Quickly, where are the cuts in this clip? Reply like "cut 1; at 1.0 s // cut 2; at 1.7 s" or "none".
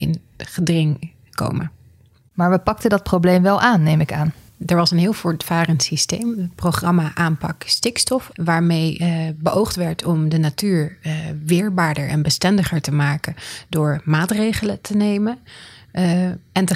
cut 1; at 8.3 s